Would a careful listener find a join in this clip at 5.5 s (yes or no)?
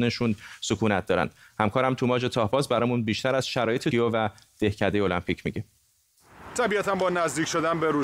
no